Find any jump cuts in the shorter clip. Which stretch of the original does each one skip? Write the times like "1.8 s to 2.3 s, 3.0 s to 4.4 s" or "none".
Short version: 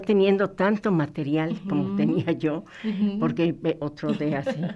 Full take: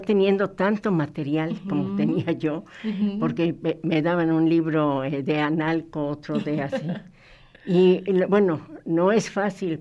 3.8 s to 6.1 s